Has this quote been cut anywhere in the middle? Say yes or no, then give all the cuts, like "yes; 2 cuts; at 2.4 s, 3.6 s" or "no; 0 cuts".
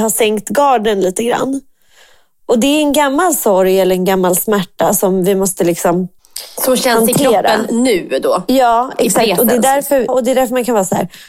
yes; 1 cut; at 10.1 s